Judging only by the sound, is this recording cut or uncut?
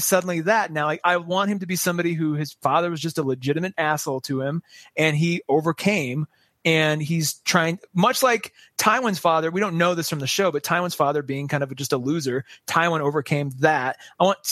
uncut